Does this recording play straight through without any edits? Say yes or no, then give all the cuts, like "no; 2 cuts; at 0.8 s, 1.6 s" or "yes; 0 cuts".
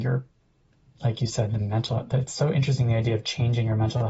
yes; 0 cuts